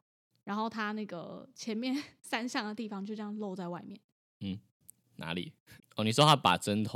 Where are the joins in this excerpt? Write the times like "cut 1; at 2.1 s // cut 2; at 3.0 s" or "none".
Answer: cut 1; at 5.8 s

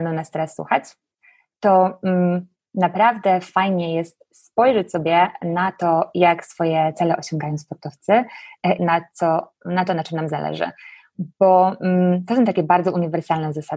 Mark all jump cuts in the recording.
cut 1; at 8.8 s

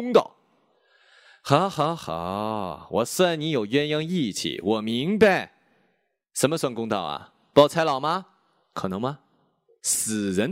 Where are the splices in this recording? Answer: none

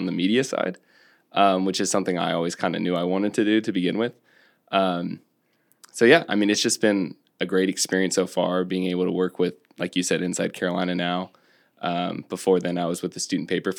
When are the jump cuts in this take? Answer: none

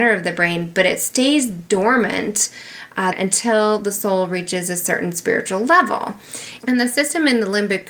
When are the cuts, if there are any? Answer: cut 1; at 3.1 s // cut 2; at 6.6 s

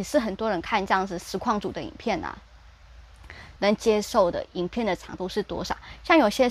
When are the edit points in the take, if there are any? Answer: cut 1; at 3.6 s

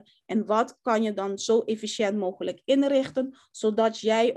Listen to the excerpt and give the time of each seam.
none

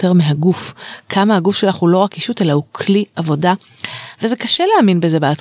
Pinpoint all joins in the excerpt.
cut 1; at 4.1 s

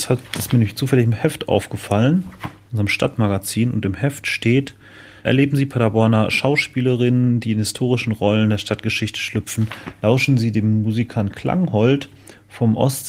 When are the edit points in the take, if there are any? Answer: cut 1; at 5.2 s

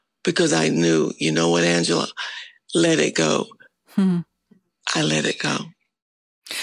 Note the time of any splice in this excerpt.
none

